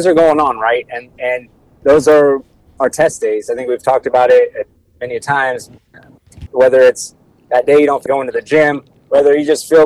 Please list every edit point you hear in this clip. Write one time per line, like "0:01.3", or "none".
0:06.5
0:08.1